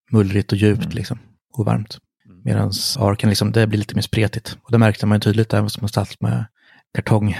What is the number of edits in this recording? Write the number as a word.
one